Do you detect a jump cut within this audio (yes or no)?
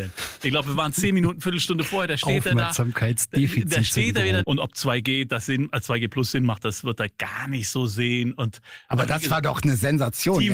yes